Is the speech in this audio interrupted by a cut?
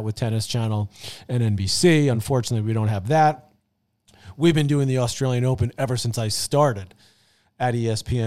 no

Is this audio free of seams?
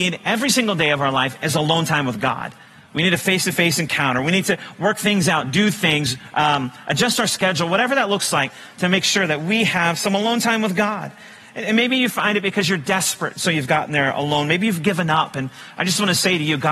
yes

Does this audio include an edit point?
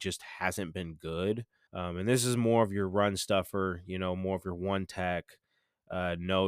yes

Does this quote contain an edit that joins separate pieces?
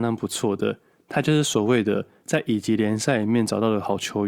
no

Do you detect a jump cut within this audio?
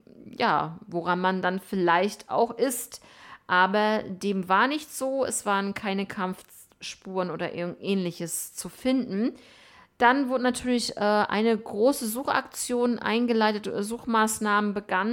no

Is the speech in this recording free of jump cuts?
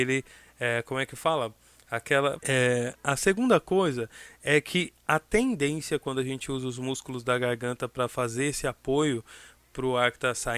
no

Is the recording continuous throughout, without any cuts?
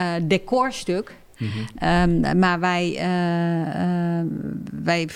yes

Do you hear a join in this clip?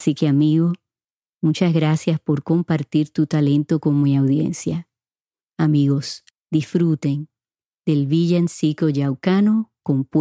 yes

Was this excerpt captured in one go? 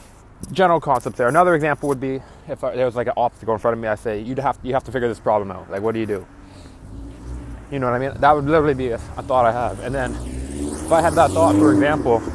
yes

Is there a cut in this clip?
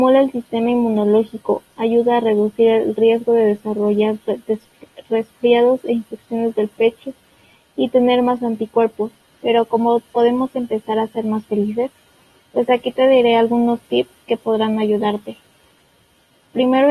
yes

